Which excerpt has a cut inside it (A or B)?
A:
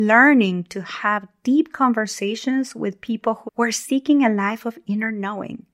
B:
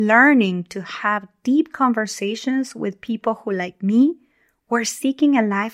A